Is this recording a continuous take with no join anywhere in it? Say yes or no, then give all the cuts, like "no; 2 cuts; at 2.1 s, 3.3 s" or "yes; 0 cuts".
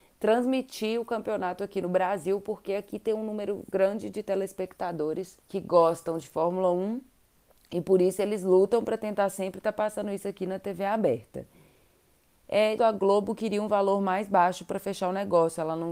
no; 2 cuts; at 5.4 s, 12.8 s